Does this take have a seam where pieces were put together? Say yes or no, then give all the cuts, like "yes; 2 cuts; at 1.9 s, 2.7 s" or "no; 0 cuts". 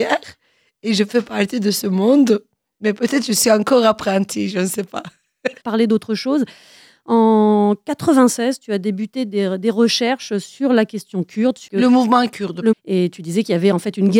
yes; 2 cuts; at 5.6 s, 12.7 s